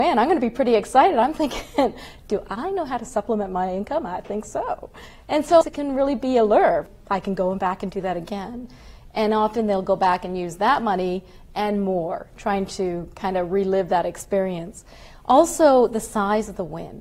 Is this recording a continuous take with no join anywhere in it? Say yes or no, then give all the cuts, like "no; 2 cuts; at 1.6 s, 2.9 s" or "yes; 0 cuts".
no; 1 cut; at 5.6 s